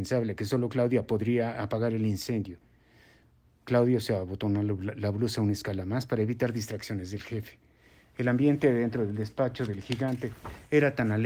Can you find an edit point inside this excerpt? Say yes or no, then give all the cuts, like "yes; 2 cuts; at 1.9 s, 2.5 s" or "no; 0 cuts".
no; 0 cuts